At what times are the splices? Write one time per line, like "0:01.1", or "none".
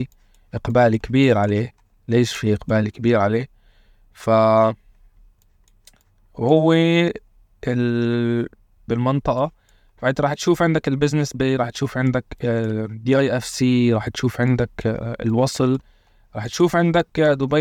0:08.9